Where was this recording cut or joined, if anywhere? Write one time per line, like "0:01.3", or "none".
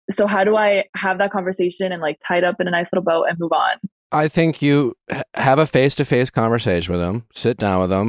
none